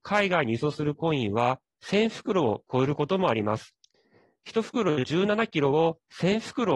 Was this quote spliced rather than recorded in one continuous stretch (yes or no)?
no